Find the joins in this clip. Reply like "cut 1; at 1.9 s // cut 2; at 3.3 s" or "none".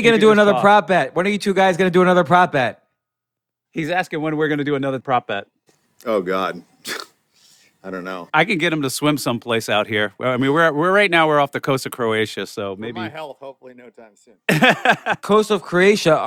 none

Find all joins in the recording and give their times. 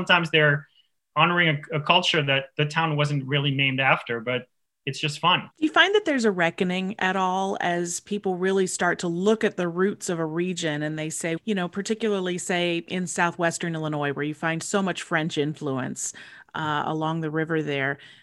cut 1; at 5.5 s // cut 2; at 11.4 s

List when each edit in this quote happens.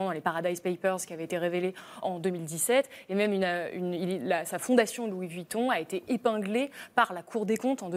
cut 1; at 2.0 s

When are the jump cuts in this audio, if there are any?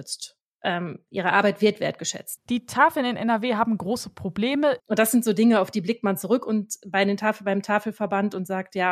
cut 1; at 2.4 s // cut 2; at 4.8 s

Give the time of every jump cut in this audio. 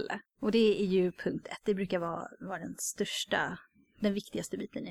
none

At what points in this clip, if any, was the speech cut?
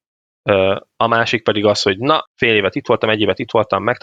cut 1; at 2.3 s

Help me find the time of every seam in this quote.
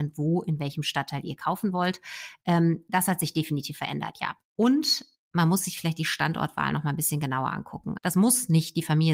cut 1; at 4.4 s // cut 2; at 8.0 s

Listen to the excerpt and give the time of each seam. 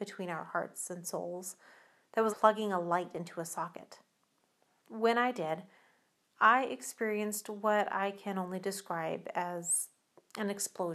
cut 1; at 2.3 s // cut 2; at 4.8 s

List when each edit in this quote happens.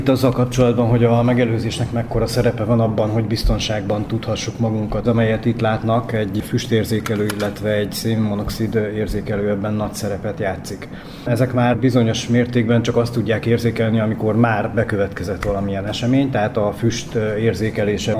cut 1; at 5.0 s

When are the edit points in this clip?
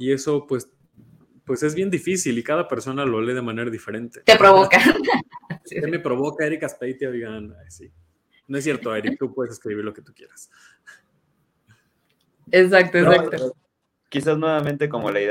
cut 1; at 4.2 s

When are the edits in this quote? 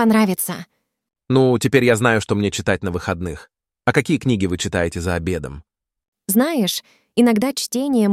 none

